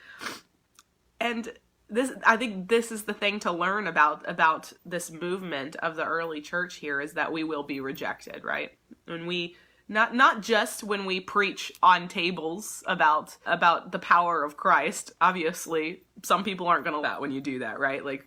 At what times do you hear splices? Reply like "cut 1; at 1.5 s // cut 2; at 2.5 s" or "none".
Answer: cut 1; at 13.5 s // cut 2; at 17.0 s